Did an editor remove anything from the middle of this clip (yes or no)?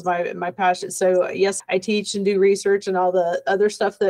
yes